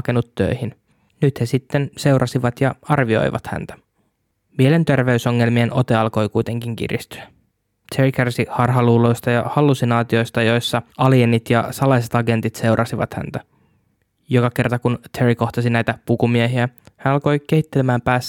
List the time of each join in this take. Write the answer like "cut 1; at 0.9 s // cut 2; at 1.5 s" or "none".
cut 1; at 10.9 s